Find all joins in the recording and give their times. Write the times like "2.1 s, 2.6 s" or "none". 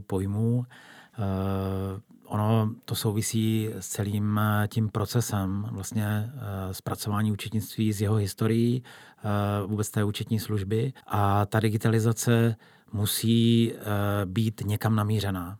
11.0 s